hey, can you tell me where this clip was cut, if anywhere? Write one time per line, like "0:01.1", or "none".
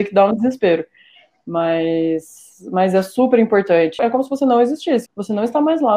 0:04.0
0:05.1

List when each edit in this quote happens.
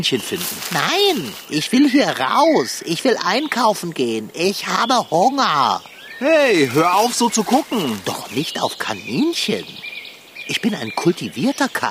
none

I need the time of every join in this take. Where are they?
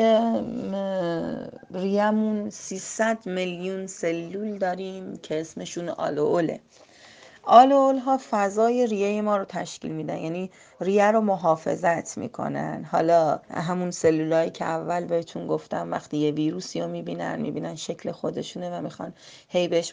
0:13.4

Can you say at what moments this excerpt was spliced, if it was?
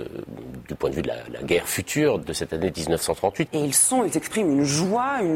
0:02.2
0:03.5

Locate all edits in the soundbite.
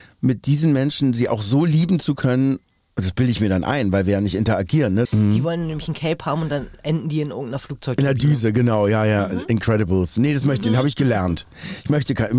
0:05.1

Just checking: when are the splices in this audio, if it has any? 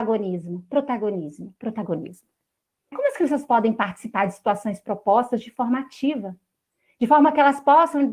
0:02.9

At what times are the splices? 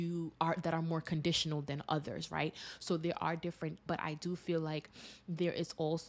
0:03.9

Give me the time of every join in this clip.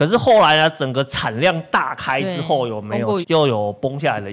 0:03.2

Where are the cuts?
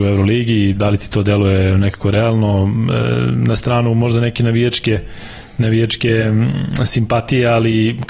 none

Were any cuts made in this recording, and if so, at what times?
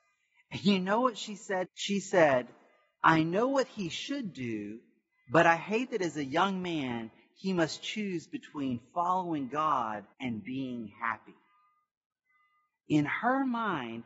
0:01.6
0:10.1

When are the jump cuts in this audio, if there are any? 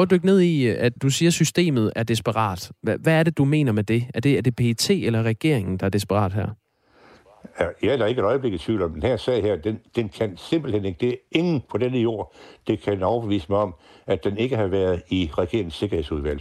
0:01.0

